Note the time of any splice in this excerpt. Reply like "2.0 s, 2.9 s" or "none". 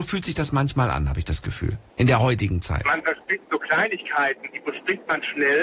1.9 s, 4.5 s